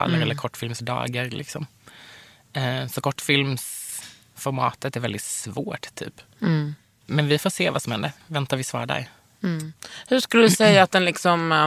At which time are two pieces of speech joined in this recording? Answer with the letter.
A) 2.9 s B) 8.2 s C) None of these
B